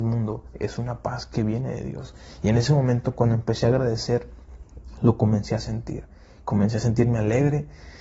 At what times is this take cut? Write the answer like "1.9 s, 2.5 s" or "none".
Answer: none

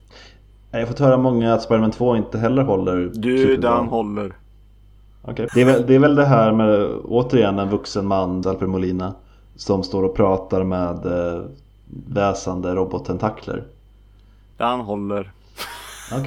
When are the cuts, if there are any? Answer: 5.5 s, 8.4 s, 14.5 s

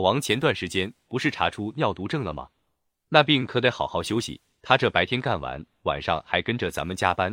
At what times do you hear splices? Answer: none

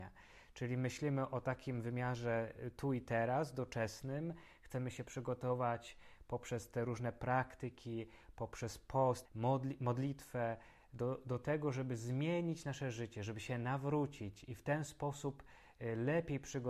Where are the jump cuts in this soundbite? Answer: 9.2 s

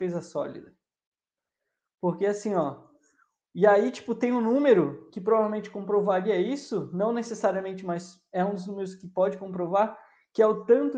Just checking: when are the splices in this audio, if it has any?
none

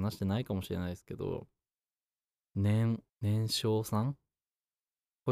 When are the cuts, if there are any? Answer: 3.1 s

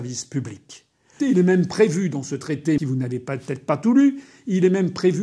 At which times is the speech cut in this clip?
1.2 s, 2.8 s

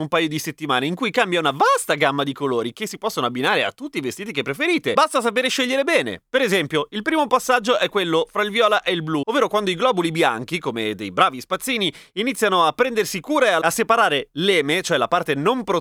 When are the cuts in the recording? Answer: none

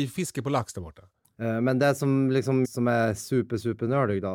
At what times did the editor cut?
1.3 s, 2.6 s

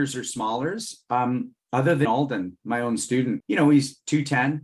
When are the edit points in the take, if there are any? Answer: 2.1 s, 3.4 s

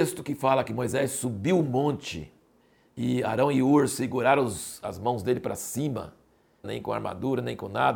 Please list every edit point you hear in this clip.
6.6 s

